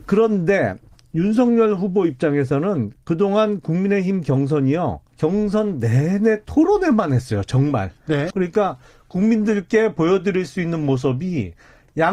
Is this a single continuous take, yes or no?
no